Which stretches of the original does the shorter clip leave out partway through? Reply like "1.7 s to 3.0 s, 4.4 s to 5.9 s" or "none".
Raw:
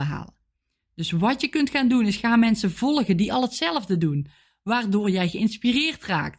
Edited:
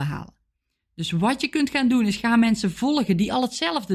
none